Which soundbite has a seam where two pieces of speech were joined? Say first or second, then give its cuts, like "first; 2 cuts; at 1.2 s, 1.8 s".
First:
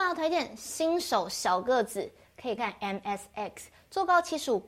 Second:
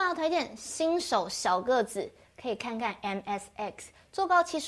first; 1 cut; at 2.6 s